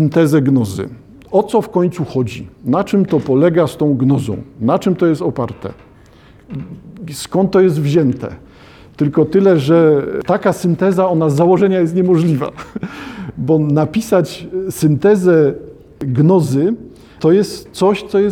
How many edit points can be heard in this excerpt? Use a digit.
0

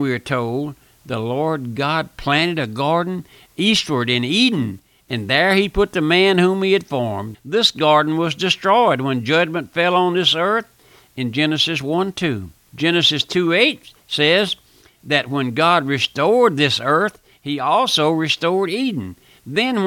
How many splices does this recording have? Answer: 1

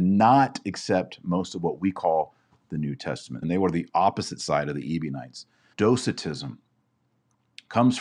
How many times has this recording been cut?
2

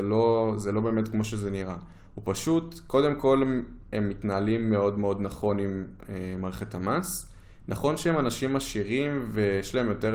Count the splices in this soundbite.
0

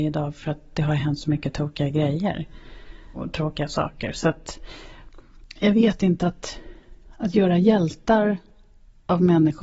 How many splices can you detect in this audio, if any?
0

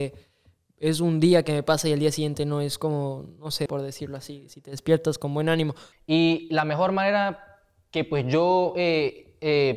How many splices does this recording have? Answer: 2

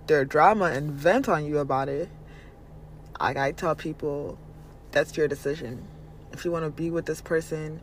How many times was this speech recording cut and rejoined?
0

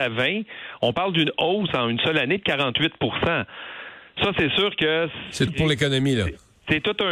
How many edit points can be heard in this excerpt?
1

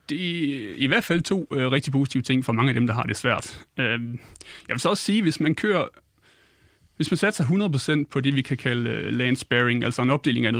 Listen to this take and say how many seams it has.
0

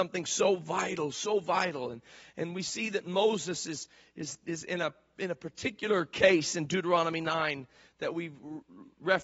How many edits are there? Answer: 0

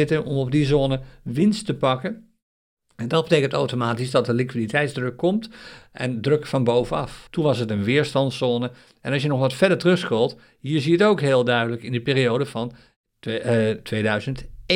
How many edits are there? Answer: 1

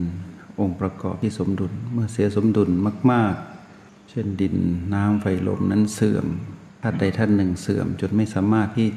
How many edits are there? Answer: 0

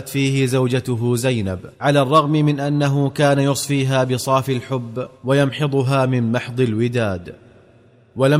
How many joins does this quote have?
2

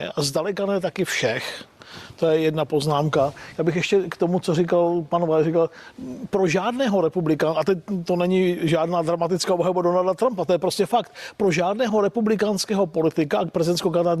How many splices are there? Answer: 0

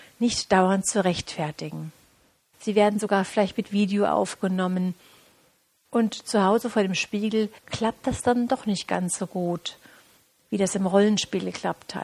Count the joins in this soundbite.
3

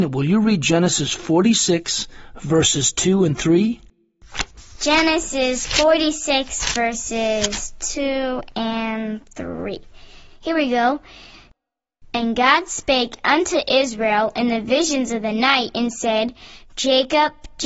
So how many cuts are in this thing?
1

